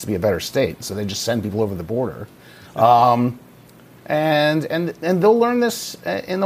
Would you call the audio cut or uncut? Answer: uncut